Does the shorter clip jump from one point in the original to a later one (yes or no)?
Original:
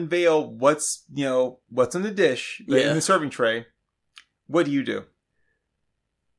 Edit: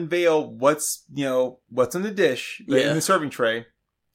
no